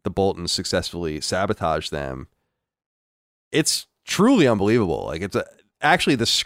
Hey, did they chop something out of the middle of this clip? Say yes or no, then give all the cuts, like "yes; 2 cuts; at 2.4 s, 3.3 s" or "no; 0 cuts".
no; 0 cuts